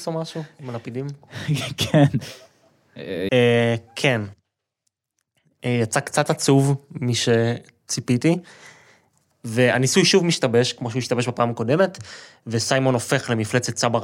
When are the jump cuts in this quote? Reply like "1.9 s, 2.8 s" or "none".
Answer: 3.3 s, 9.3 s